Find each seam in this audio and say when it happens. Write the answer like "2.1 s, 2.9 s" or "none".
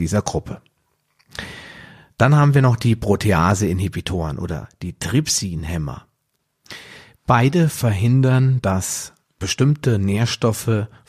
none